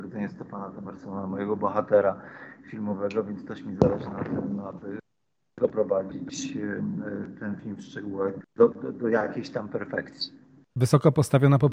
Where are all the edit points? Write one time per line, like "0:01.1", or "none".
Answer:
0:08.4